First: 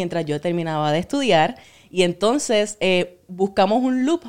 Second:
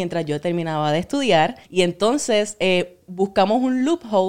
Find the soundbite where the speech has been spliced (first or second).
second